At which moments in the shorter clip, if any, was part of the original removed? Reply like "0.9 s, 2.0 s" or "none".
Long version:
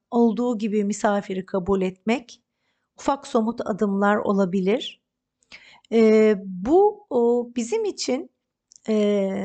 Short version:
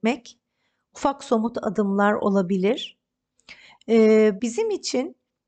4.4 s

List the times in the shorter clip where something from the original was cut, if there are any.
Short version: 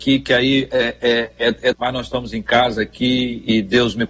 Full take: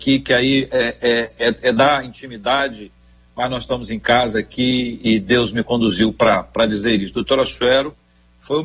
1.7 s

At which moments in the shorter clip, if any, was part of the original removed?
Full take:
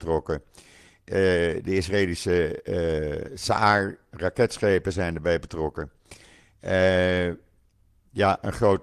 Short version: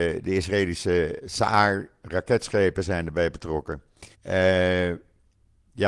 1.2 s, 4.1 s

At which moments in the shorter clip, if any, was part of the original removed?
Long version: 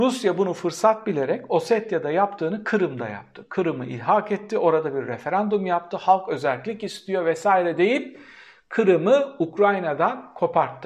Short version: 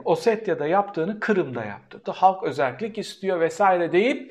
2.0 s

